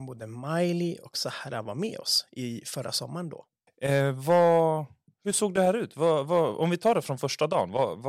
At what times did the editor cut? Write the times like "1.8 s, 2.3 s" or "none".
3.7 s